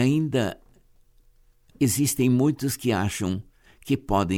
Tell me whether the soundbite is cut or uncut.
cut